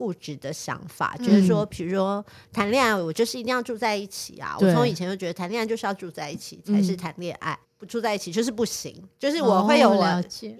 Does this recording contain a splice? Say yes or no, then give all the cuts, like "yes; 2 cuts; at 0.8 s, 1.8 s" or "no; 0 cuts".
yes; 1 cut; at 7.6 s